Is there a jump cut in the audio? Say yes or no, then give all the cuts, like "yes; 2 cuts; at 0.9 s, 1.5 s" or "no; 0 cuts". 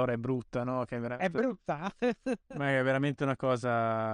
no; 0 cuts